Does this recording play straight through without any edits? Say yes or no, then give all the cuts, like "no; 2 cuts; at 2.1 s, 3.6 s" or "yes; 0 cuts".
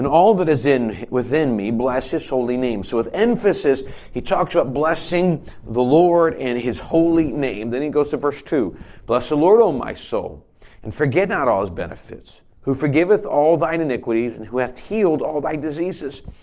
yes; 0 cuts